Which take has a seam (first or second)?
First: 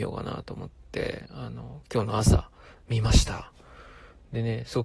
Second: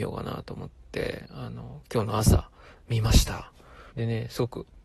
second